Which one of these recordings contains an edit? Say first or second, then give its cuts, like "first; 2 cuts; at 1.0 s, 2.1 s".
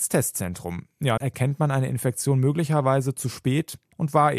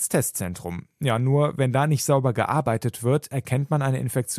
first; 1 cut; at 1.2 s